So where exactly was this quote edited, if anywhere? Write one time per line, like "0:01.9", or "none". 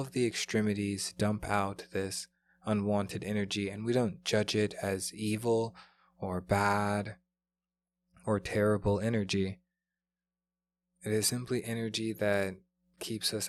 none

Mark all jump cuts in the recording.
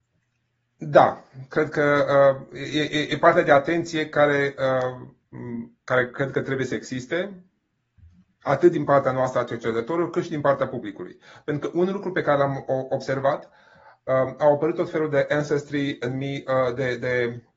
none

